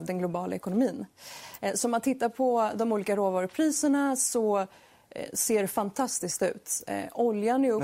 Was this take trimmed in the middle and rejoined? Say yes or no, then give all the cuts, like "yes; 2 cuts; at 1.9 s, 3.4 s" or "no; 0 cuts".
no; 0 cuts